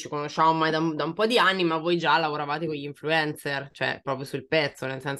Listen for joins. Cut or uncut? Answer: cut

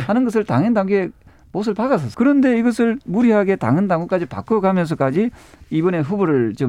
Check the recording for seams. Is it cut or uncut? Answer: cut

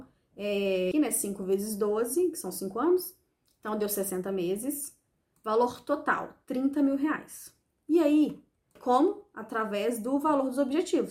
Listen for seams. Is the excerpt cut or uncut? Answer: cut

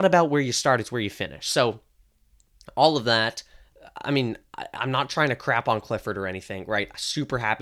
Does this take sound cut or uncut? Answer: uncut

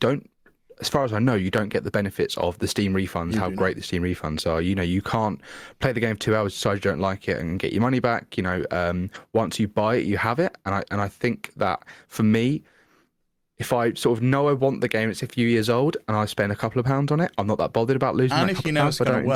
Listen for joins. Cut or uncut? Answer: uncut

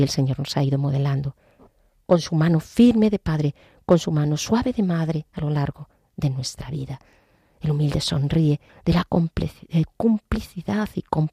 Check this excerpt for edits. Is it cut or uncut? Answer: cut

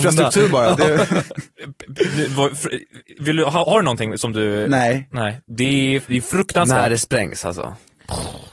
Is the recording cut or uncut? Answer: cut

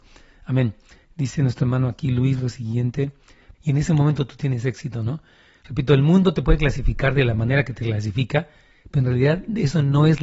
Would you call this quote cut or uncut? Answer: cut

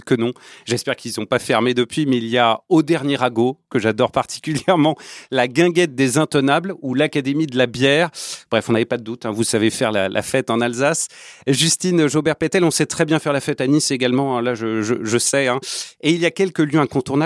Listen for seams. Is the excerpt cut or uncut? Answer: uncut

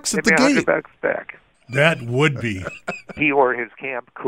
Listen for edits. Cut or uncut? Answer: cut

